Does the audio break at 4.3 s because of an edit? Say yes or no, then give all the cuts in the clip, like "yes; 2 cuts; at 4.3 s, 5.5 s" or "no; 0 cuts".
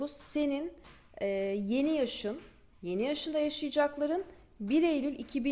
no; 0 cuts